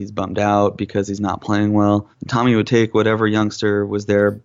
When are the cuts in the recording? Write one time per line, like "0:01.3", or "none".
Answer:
0:02.1